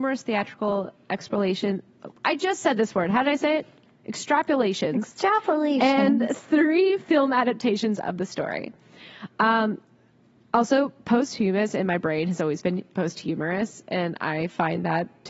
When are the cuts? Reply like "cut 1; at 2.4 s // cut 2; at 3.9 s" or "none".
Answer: none